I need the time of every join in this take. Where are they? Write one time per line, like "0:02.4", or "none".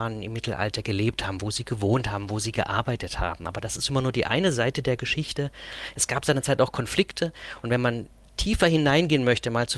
none

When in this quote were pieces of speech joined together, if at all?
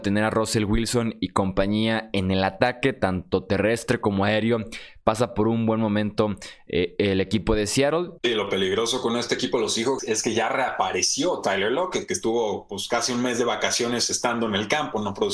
0:08.2
0:10.0

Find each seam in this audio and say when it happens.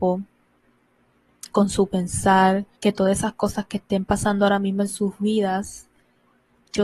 0:02.8

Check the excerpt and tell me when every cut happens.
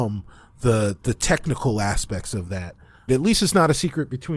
0:03.1

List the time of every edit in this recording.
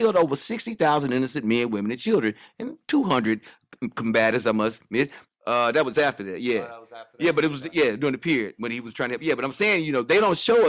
0:05.3

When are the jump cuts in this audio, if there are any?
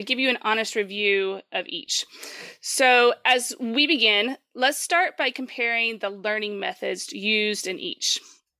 none

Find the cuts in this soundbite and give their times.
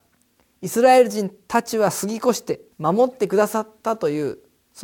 0:02.7

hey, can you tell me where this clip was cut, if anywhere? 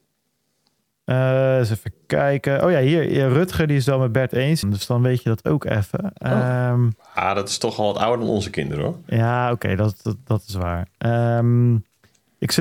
0:04.6

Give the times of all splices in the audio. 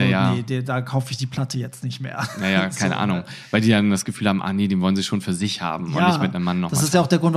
none

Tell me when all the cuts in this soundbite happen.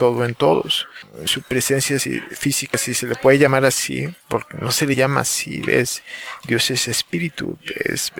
none

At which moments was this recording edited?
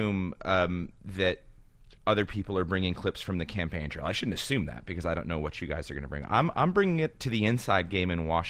none

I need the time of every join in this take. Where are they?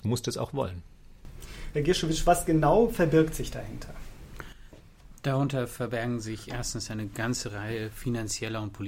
0:01.7

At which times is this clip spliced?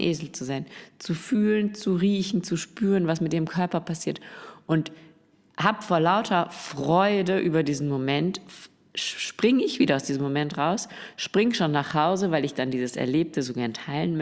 none

